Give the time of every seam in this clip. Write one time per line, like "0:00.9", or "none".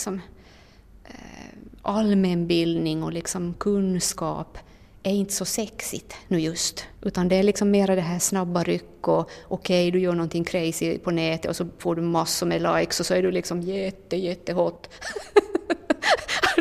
0:06.9